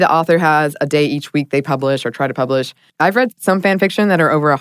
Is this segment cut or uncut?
cut